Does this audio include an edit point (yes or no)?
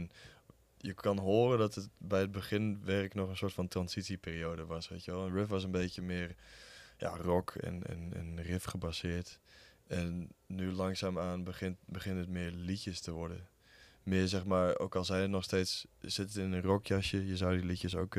no